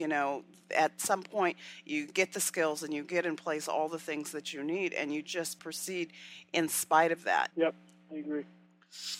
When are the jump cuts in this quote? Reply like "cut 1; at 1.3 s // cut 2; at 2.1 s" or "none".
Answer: cut 1; at 7.5 s